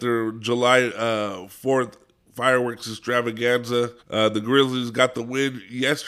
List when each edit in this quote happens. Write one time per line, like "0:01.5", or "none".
0:04.0